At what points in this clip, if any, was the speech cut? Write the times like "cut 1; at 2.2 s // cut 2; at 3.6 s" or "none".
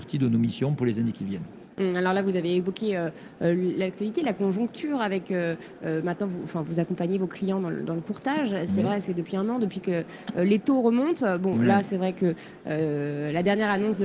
none